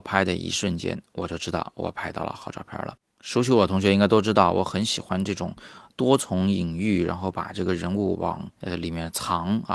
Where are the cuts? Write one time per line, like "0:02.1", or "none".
0:08.5